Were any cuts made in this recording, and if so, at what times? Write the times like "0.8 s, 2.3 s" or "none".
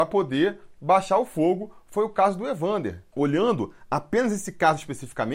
none